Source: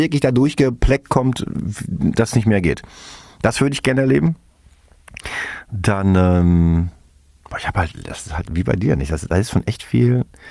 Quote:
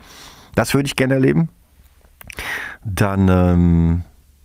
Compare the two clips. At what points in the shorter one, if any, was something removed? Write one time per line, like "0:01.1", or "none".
none